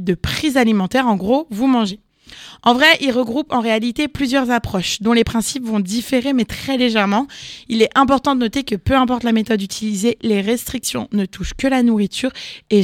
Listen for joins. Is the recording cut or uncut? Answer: uncut